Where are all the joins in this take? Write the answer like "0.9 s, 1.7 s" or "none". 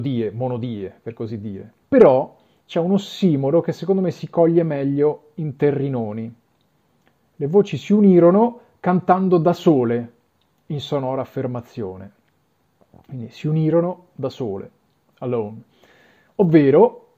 1.8 s